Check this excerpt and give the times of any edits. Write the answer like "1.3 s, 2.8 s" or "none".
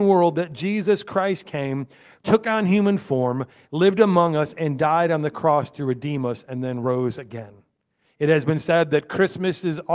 none